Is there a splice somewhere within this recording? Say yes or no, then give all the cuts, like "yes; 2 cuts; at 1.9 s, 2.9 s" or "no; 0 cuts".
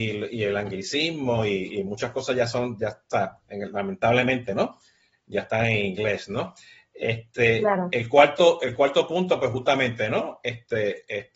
no; 0 cuts